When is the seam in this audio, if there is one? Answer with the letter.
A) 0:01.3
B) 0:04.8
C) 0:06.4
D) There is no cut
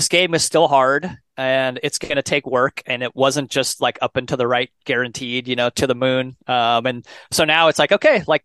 D